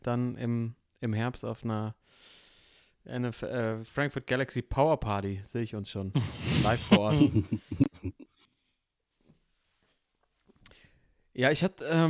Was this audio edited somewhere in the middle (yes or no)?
no